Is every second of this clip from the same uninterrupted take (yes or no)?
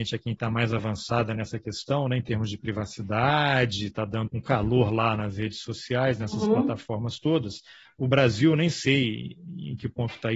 no